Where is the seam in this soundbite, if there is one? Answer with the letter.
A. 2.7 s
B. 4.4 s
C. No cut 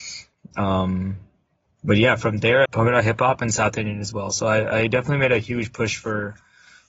A